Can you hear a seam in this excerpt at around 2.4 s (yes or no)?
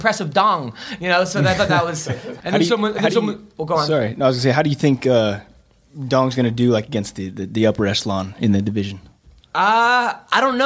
yes